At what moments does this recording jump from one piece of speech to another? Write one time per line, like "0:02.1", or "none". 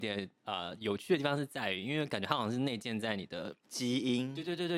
0:03.6